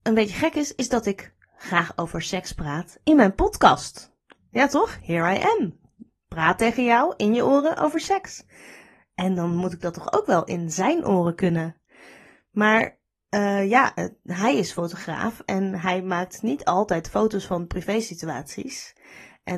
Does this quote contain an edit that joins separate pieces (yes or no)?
no